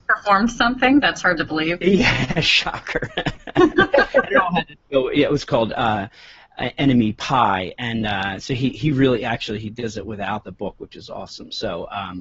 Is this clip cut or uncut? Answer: uncut